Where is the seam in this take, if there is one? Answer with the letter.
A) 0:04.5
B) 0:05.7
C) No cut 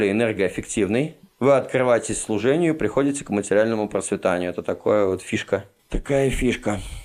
C